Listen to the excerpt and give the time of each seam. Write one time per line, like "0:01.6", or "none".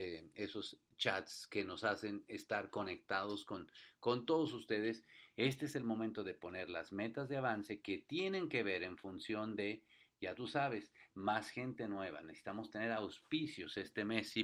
0:05.3